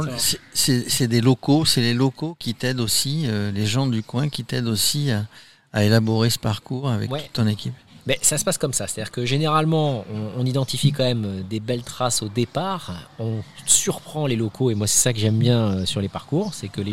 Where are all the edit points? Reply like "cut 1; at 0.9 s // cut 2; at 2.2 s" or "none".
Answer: none

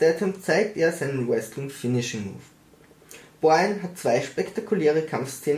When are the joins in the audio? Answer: none

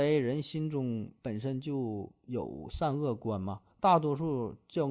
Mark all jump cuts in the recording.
cut 1; at 3.7 s

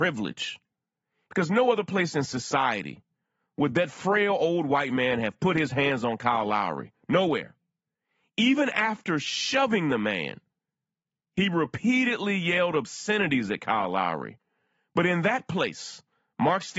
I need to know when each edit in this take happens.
cut 1; at 1.3 s

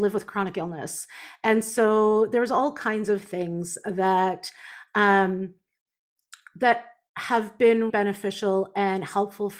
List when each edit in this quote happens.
cut 1; at 7.9 s

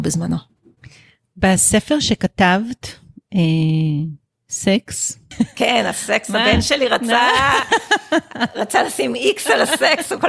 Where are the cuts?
none

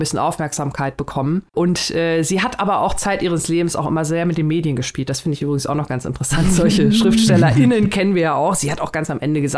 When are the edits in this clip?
cut 1; at 1.5 s

